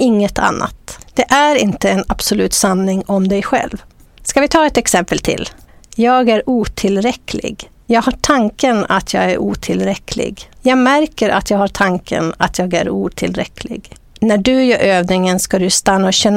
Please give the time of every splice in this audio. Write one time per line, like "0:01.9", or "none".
none